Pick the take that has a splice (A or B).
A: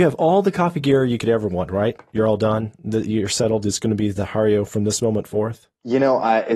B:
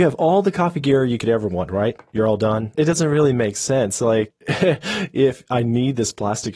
B